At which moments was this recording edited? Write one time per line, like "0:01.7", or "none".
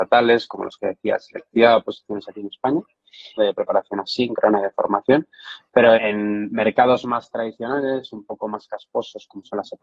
0:03.4
0:05.9